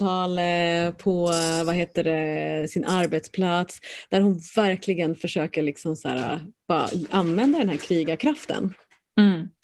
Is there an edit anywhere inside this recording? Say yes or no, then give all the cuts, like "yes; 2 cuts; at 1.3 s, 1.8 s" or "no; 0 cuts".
no; 0 cuts